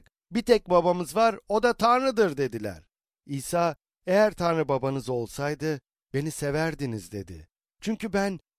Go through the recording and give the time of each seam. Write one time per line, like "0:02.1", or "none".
none